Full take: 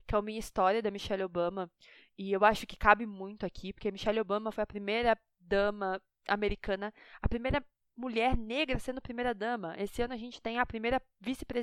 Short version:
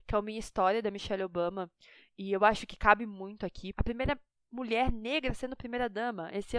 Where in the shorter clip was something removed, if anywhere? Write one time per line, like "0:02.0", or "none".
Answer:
0:03.7